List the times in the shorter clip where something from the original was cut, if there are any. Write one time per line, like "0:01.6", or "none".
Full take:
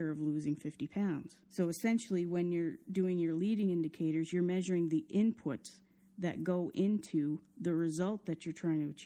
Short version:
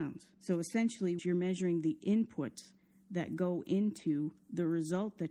0:01.2